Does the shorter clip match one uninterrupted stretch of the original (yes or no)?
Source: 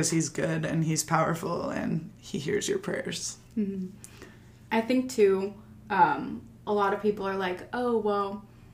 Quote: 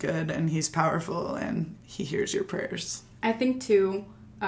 no